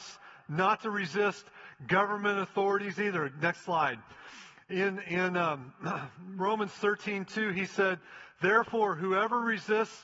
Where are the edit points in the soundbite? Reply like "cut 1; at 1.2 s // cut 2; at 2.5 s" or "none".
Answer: none